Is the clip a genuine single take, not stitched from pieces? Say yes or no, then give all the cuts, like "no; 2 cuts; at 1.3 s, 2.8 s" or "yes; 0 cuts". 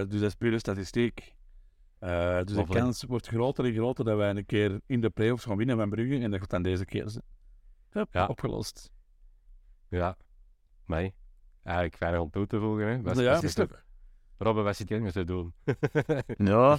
no; 2 cuts; at 13.4 s, 14.9 s